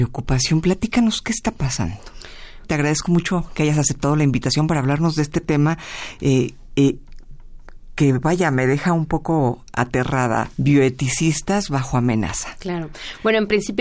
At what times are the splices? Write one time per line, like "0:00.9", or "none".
0:02.6